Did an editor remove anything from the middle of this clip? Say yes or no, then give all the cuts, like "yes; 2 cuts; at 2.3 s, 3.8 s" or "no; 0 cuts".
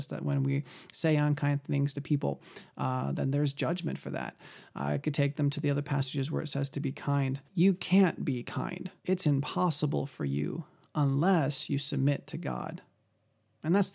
yes; 2 cuts; at 7.5 s, 9.0 s